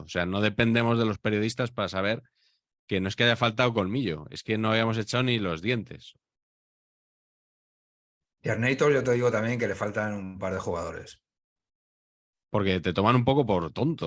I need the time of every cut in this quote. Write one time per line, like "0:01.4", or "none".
0:12.3